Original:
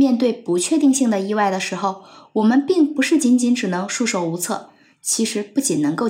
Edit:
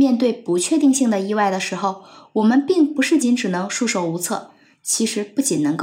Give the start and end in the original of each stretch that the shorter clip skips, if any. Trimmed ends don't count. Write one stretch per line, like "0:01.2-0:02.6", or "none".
0:03.2-0:03.4